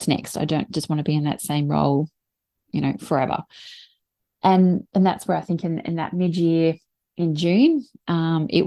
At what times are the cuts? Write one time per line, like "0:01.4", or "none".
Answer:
none